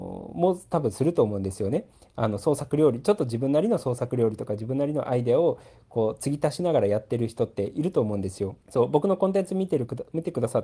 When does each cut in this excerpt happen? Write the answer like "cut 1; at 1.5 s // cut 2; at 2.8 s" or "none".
cut 1; at 8.6 s